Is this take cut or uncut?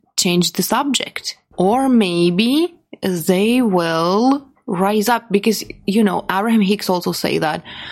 cut